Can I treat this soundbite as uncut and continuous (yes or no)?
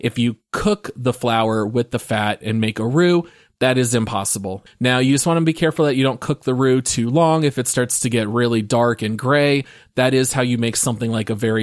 no